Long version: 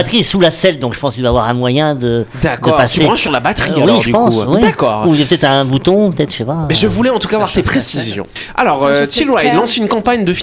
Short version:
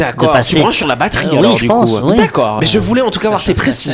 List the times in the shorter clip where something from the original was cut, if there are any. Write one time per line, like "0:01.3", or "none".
0:02.6